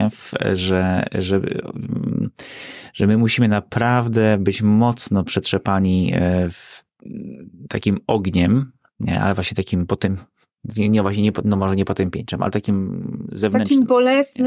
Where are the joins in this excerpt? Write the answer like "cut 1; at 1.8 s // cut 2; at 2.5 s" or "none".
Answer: none